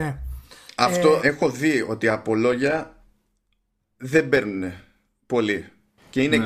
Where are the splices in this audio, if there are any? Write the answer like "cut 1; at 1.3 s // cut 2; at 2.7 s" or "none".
cut 1; at 1.2 s